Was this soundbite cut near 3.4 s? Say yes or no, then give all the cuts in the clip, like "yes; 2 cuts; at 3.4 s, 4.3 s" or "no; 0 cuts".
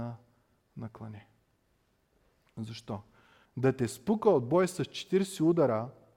yes; 1 cut; at 3.4 s